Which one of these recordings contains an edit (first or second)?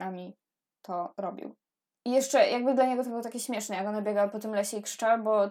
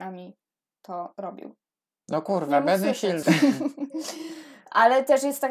second